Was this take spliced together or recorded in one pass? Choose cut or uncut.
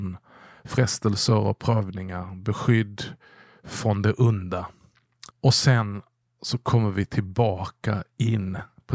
cut